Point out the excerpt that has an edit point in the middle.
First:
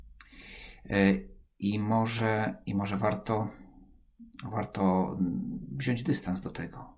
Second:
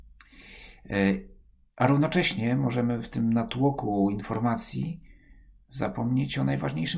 first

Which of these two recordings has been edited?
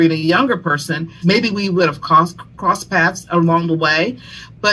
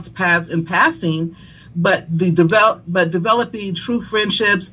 first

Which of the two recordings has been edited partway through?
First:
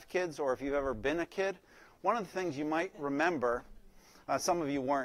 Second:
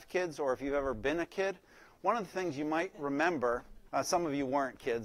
second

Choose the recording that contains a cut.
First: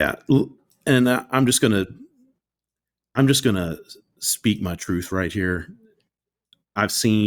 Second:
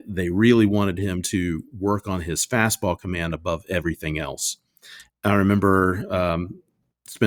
second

